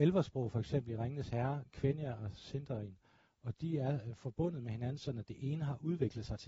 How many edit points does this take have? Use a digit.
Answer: 0